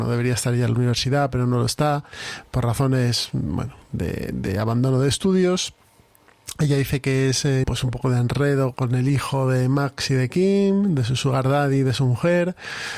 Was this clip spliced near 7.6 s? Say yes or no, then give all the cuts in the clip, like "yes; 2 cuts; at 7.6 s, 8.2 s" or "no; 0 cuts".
yes; 2 cuts; at 7.6 s, 8.7 s